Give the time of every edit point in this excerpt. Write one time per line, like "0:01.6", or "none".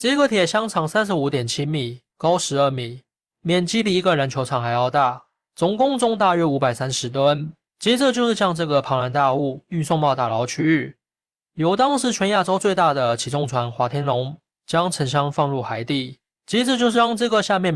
0:02.1